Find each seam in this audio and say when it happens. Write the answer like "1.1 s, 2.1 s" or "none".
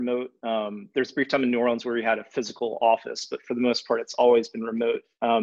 none